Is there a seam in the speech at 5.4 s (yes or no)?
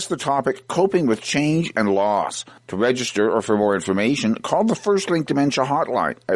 no